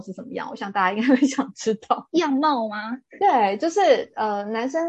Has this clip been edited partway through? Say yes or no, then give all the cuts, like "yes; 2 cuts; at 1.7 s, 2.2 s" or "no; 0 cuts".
no; 0 cuts